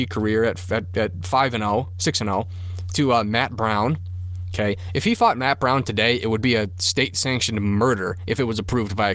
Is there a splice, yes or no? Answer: no